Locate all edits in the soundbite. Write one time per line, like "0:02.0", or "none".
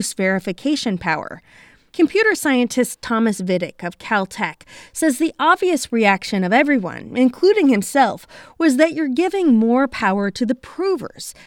none

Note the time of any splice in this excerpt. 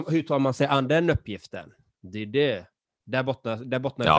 none

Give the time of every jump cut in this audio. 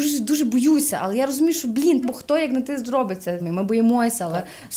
0:02.0
0:03.4

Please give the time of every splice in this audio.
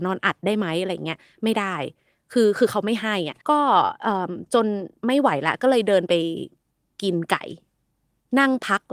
0:03.4

